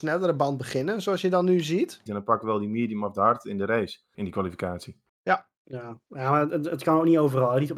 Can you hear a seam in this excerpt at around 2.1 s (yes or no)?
yes